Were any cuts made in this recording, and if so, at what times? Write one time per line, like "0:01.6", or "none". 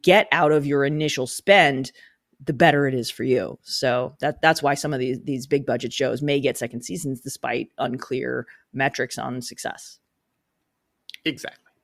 none